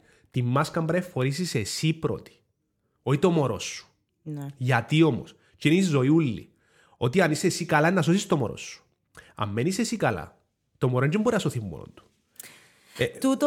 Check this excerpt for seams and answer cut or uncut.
uncut